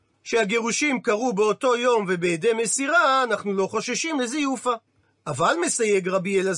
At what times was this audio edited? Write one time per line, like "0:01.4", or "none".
none